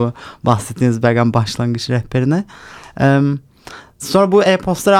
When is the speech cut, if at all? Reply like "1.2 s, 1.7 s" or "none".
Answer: none